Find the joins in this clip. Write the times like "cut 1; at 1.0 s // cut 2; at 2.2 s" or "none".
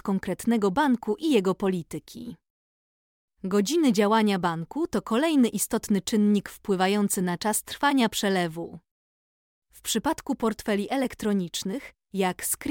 cut 1; at 9.5 s